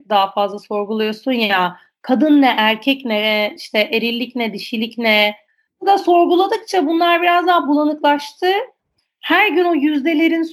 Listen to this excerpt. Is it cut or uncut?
uncut